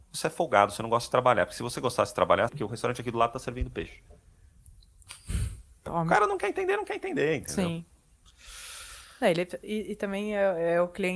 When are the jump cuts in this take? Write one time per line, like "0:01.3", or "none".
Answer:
0:02.5